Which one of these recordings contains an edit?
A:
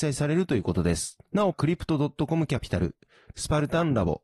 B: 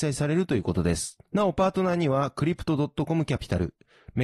A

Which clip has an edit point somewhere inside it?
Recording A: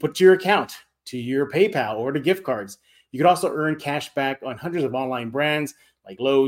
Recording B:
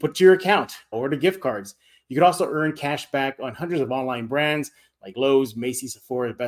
B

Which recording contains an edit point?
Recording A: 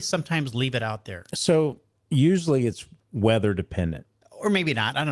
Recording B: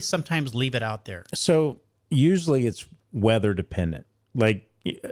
A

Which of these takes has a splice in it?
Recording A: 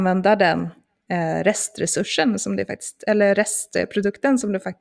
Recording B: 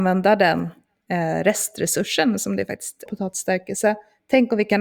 B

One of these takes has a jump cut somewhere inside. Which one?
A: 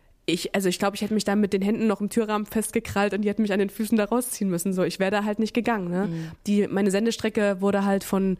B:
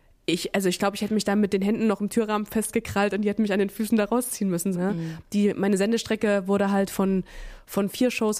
B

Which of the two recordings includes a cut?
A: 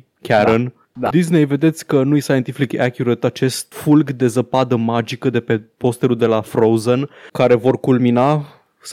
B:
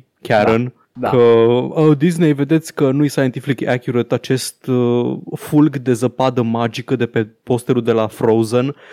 A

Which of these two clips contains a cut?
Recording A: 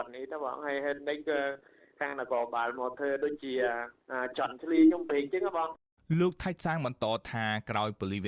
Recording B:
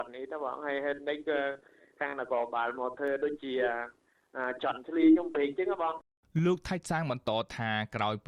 A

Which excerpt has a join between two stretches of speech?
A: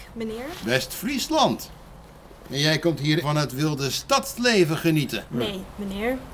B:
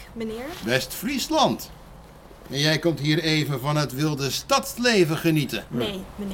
A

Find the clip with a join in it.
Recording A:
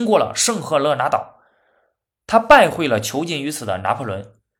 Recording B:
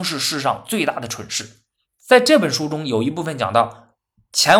B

